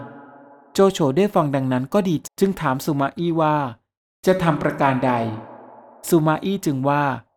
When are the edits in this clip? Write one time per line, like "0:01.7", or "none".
0:02.2